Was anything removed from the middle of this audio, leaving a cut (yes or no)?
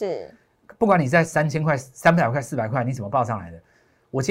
no